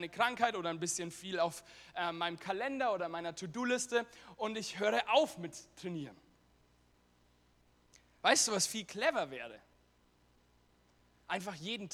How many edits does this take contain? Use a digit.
0